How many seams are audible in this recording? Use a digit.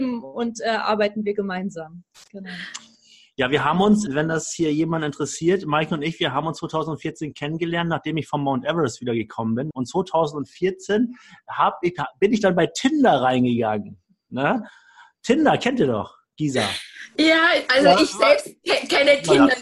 2